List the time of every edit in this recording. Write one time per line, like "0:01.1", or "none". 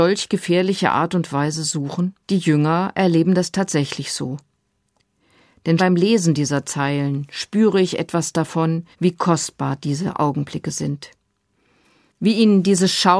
0:02.2
0:05.8
0:08.9